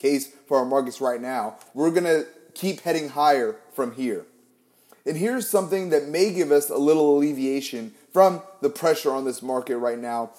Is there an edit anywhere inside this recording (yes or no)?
yes